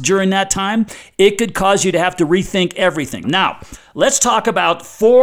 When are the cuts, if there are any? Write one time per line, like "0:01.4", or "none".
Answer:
0:03.2